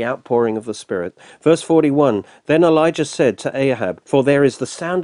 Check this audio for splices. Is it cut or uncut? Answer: cut